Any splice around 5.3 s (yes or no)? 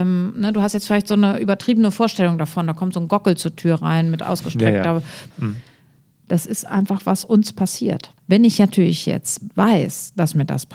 yes